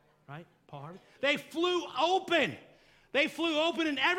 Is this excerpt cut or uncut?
cut